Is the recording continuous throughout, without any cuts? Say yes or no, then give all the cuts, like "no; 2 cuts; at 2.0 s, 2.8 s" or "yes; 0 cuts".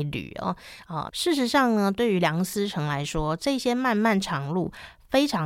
no; 1 cut; at 1.1 s